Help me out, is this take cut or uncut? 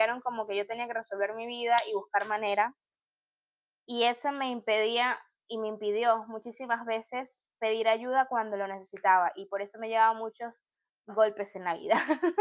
uncut